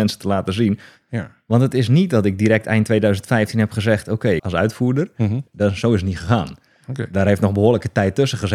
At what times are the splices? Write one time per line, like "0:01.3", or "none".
0:01.0
0:04.4
0:05.5